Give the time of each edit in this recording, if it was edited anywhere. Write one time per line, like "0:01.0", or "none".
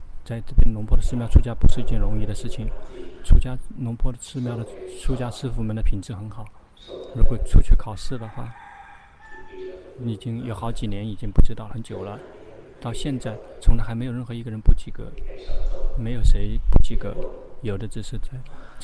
none

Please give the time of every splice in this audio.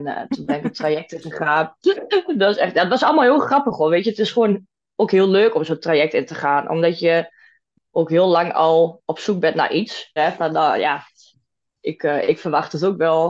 0:10.2

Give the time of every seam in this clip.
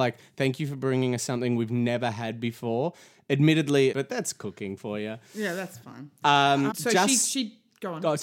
0:03.9
0:06.7

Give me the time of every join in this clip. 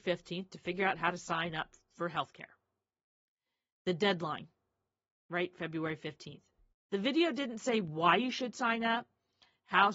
0:06.7

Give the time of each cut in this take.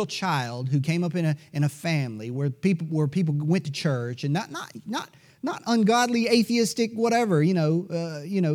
none

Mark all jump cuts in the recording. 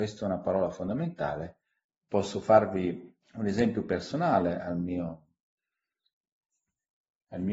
0:01.9
0:03.2

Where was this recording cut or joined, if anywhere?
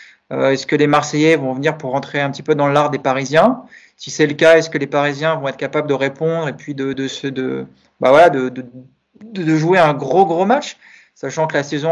none

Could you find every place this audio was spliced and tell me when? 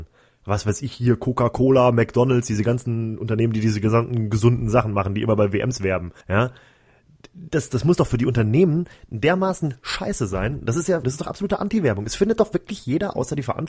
0:06.2
0:11.0

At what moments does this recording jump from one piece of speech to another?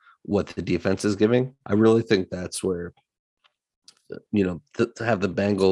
0:01.6

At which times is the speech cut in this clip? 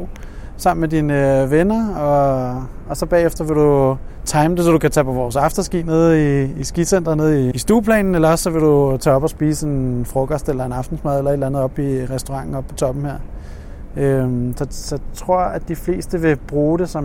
0:07.5

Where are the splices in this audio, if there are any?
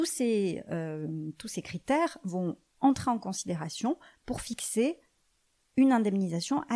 none

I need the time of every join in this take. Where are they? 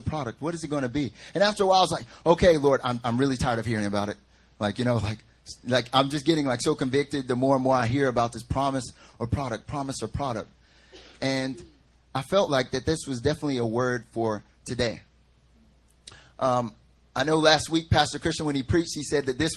none

